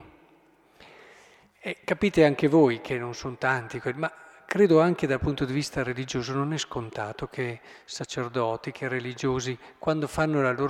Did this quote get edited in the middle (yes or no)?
no